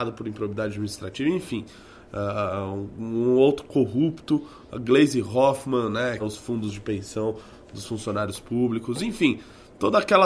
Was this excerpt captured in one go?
no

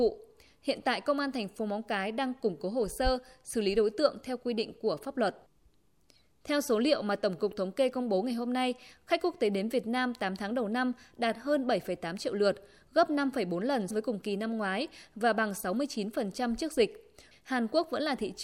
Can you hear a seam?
yes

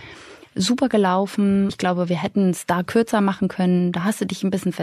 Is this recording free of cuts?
yes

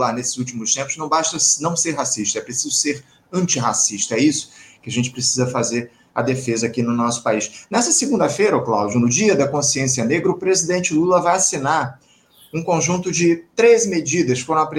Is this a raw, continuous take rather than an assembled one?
yes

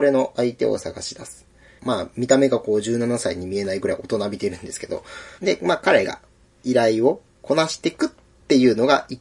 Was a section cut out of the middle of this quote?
yes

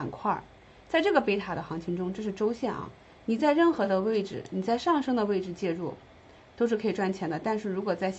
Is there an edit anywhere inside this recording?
no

